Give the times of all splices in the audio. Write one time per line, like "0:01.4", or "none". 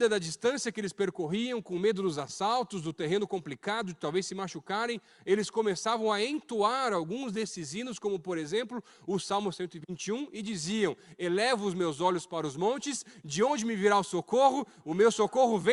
none